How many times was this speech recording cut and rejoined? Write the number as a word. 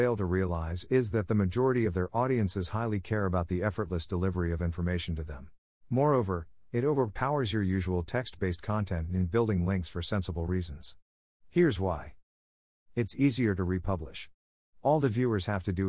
one